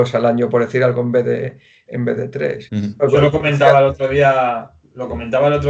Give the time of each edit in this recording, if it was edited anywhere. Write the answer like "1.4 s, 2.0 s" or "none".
2.7 s